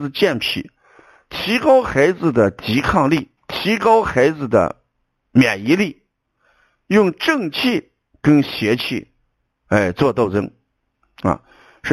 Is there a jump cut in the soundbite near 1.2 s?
no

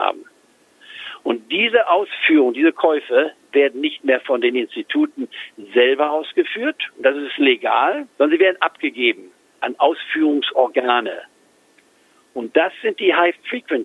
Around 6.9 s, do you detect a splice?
no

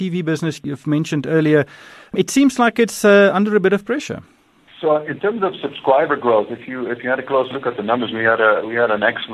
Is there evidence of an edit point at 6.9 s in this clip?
no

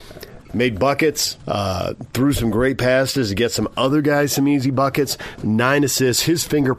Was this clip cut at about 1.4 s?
yes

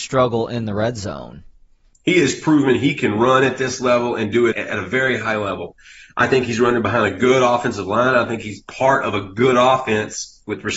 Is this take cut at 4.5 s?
yes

